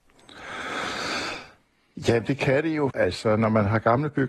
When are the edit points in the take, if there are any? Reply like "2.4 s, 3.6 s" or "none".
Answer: 2.9 s